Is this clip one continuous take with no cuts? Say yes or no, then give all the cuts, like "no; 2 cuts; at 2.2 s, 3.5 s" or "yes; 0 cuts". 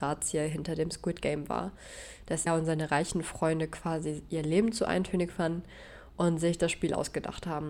no; 1 cut; at 2.5 s